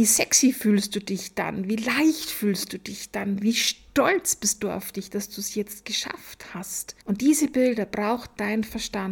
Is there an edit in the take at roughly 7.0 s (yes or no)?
yes